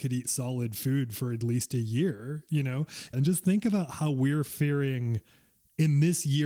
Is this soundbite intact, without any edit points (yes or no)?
no